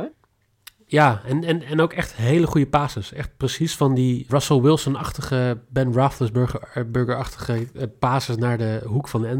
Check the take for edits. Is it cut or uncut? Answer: cut